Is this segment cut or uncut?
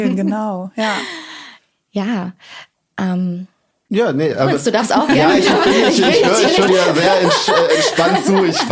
cut